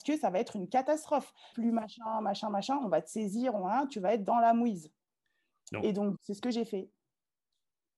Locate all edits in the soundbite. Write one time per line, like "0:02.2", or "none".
0:01.5
0:06.1